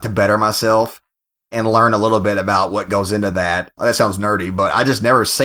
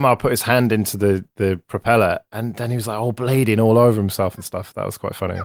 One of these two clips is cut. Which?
first; 1 cut; at 3.8 s

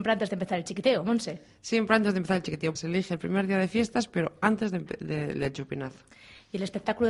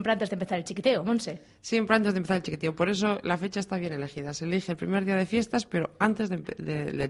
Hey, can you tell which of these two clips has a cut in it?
first; 1 cut; at 2.8 s

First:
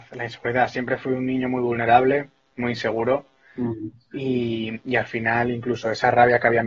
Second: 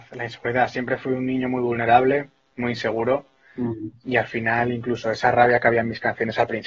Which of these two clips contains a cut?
second; 1 cut; at 4.0 s

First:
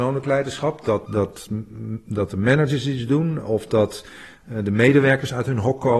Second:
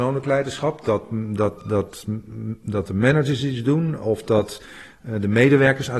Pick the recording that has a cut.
first; 1 cut; at 1.1 s

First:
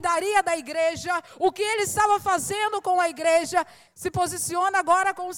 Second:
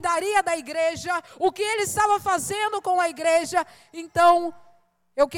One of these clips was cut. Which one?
first; 1 cut; at 3.9 s

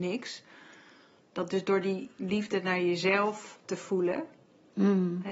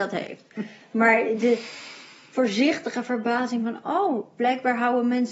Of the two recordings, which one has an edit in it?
first; 1 cut; at 3.6 s

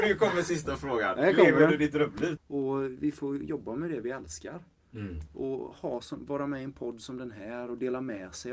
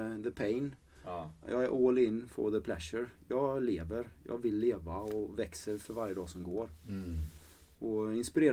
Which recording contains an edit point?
first; 1 cut; at 2.4 s

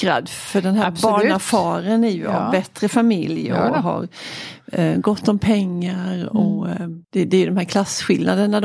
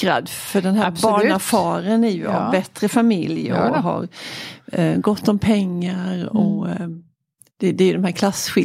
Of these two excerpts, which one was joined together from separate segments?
first; 1 cut; at 7.0 s

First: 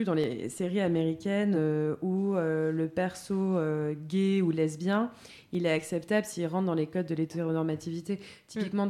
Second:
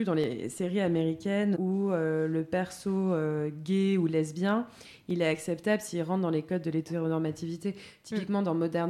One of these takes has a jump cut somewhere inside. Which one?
second; 1 cut; at 1.5 s

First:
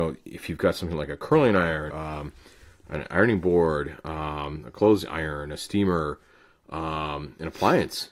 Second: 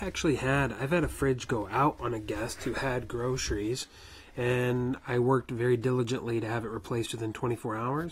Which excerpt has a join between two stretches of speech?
first; 1 cut; at 1.9 s

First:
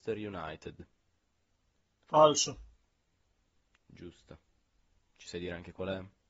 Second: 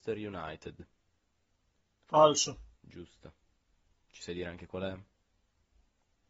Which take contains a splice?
second; 1 cut; at 2.8 s

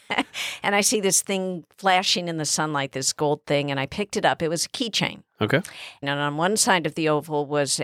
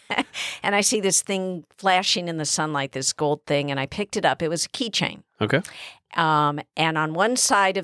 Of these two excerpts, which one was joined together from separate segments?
first; 1 cut; at 6.0 s

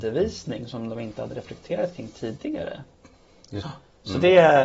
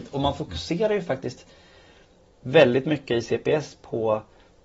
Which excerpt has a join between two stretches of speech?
first; 1 cut; at 3.6 s

